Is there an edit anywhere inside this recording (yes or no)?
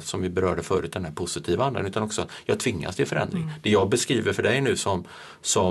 no